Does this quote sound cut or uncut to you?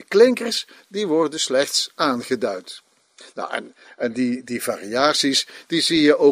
uncut